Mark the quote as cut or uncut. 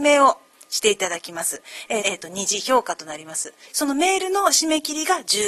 cut